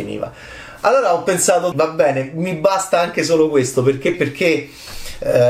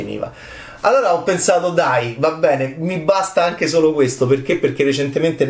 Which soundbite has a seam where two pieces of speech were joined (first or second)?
first